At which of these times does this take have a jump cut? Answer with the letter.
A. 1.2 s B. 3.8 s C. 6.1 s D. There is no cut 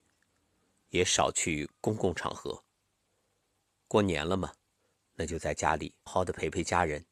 C